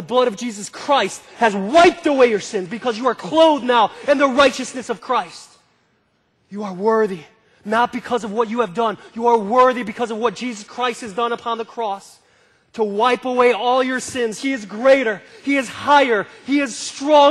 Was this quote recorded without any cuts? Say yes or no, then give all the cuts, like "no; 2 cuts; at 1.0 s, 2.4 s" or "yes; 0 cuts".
yes; 0 cuts